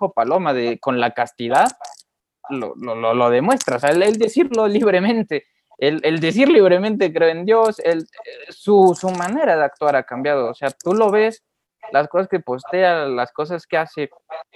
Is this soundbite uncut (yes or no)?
yes